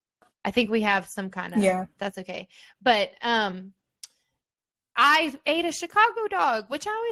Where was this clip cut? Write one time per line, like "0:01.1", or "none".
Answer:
0:02.0